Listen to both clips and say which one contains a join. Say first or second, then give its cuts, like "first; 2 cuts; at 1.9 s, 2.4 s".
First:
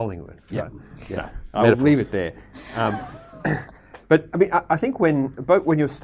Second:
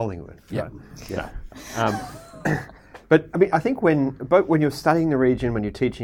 second; 2 cuts; at 1.5 s, 3.5 s